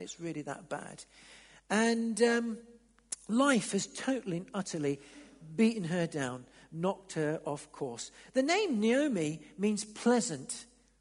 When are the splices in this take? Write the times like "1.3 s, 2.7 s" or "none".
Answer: none